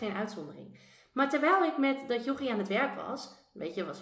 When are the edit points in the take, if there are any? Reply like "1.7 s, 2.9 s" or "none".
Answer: none